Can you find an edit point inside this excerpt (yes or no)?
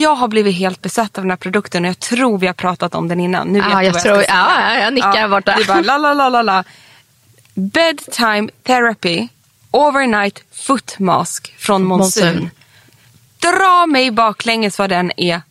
no